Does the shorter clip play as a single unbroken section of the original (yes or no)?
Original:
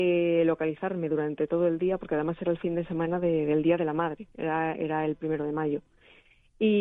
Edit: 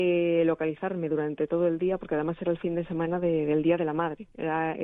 yes